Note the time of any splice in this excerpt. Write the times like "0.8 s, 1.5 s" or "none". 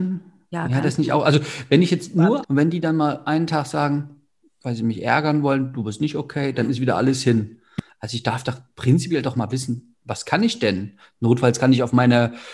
2.4 s